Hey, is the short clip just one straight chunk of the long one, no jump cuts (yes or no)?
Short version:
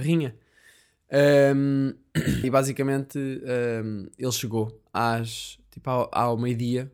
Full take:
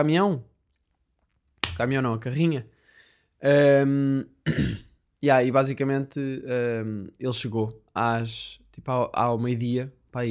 no